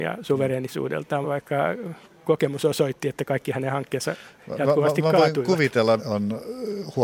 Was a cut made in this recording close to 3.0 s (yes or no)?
no